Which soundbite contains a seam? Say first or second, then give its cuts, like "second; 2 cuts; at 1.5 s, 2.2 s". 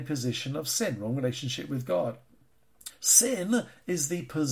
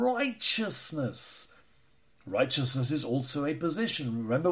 first; 1 cut; at 2.9 s